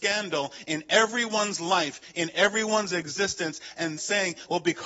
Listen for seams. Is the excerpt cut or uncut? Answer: cut